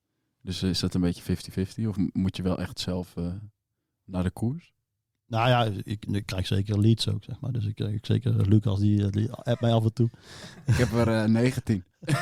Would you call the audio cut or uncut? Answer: uncut